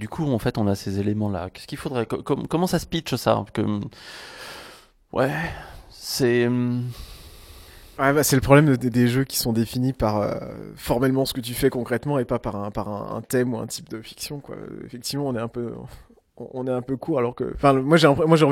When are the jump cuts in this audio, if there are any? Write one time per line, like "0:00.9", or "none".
0:08.0